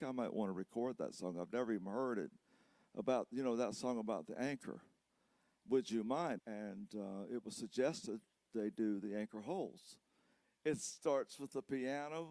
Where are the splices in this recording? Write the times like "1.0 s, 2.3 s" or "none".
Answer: 6.4 s, 10.4 s